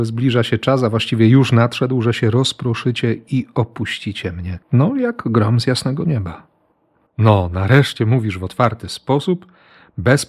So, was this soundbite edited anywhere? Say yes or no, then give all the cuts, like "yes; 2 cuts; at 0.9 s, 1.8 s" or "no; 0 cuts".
yes; 2 cuts; at 4.6 s, 7.1 s